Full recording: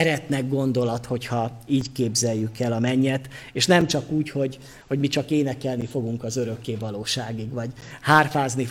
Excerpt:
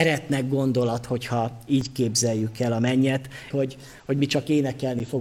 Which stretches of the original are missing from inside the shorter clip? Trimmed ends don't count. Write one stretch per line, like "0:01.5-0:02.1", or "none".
0:03.5-0:04.3